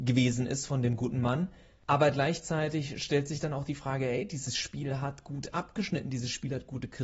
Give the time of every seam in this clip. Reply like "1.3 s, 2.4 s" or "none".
none